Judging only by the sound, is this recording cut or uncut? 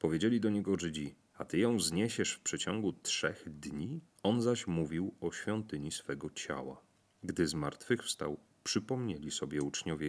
cut